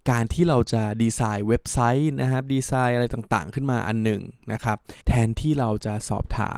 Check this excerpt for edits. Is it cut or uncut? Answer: cut